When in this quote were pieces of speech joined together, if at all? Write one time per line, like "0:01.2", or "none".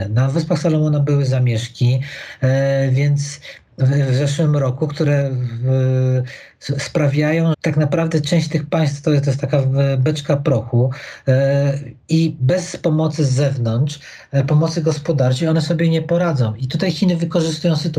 0:07.5